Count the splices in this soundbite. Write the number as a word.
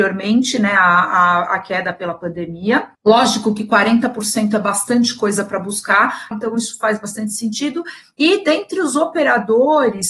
two